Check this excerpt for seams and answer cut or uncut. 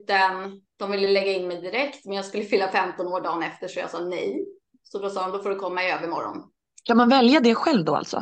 uncut